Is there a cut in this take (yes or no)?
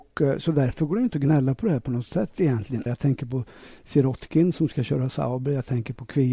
yes